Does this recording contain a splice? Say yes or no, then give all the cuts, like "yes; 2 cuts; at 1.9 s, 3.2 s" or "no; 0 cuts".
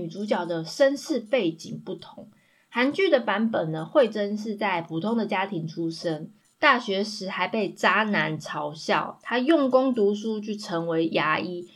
no; 0 cuts